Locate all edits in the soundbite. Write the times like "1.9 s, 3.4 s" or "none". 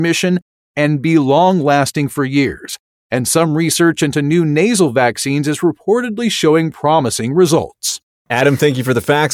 none